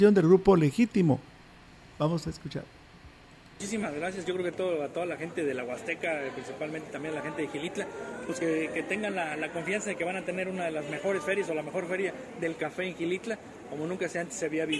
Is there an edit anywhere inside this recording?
no; 0 cuts

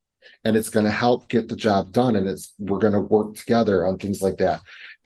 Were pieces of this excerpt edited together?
no; 0 cuts

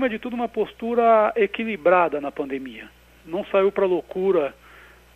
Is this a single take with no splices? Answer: yes; 0 cuts

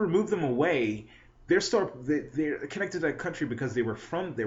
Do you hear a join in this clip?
no; 0 cuts

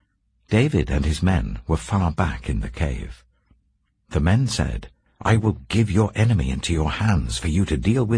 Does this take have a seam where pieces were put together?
yes; 1 cut; at 5.1 s

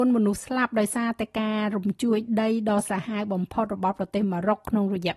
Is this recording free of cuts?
yes; 0 cuts

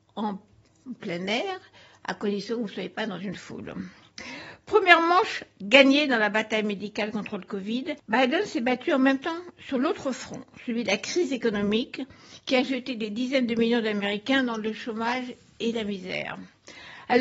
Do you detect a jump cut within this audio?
yes; 1 cut; at 8.0 s

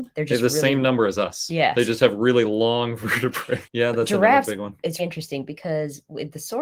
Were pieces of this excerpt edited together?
yes; 2 cuts; at 3.7 s, 5.0 s

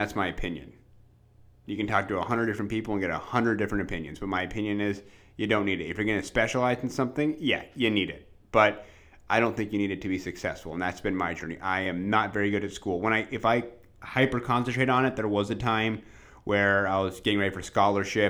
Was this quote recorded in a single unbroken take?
yes; 0 cuts

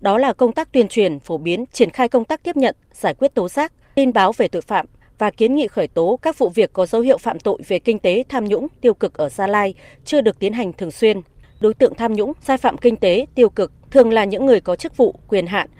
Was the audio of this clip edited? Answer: yes; 1 cut; at 1.7 s

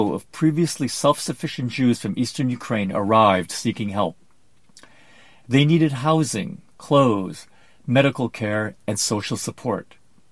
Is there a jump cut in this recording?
yes; 1 cut; at 6.8 s

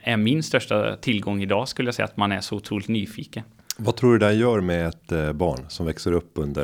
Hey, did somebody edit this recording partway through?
no; 0 cuts

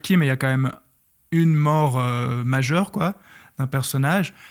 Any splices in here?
no; 0 cuts

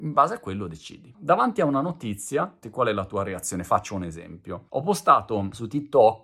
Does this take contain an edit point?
yes; 2 cuts; at 1.1 s, 2.6 s

